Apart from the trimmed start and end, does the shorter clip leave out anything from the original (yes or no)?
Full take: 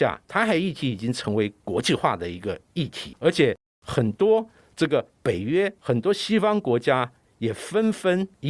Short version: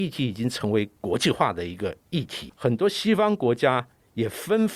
yes